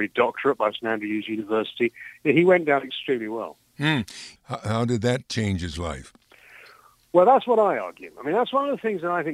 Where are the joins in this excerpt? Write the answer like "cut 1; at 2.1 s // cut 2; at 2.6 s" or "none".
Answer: cut 1; at 4.4 s

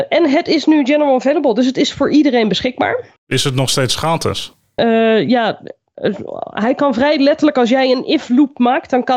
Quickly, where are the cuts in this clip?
cut 1; at 4.8 s

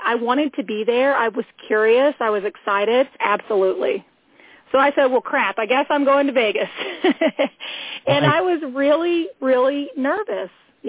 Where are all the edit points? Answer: cut 1; at 3.2 s

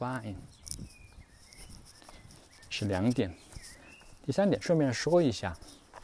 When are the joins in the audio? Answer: none

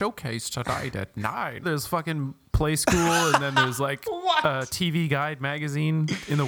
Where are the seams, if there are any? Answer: cut 1; at 1.6 s

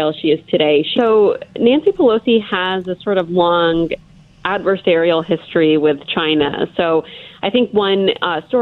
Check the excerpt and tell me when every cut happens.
cut 1; at 0.9 s

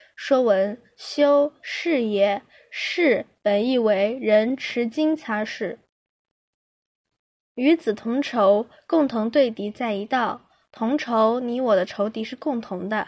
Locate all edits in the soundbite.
none

